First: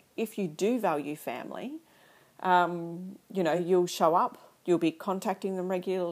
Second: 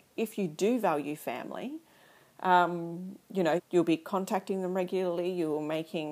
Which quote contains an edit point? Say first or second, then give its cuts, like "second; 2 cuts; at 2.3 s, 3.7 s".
second; 1 cut; at 3.6 s